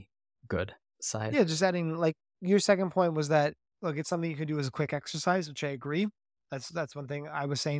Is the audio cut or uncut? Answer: uncut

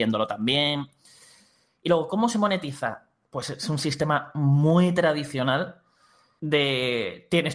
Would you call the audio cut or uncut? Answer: uncut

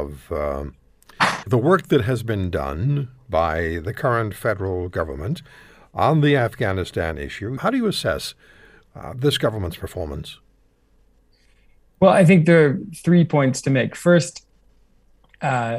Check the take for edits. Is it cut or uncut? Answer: cut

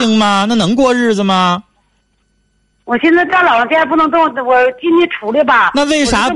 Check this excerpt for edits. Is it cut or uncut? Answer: uncut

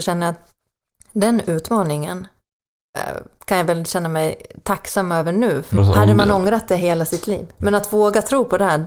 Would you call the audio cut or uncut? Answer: cut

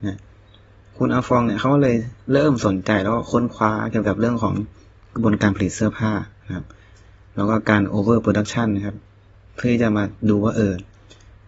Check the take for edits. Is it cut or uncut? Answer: uncut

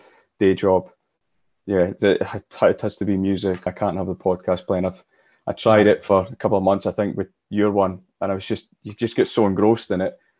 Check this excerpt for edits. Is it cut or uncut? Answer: cut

